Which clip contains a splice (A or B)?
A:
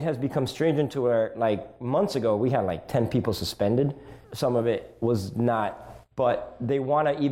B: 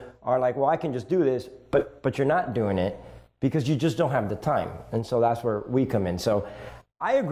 A